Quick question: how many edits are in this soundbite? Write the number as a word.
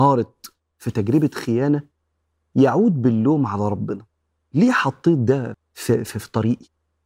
one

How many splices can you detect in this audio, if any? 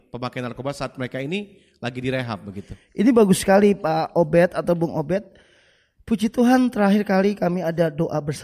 zero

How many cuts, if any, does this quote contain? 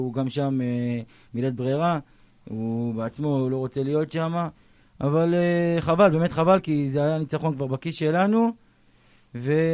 zero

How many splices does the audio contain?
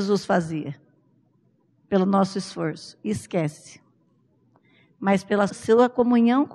one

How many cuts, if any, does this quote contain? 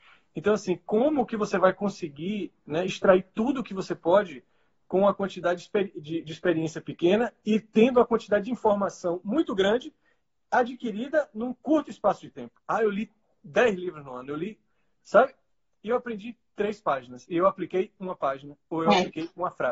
zero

